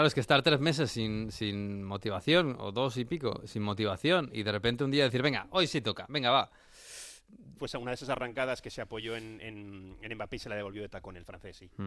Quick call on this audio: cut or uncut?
cut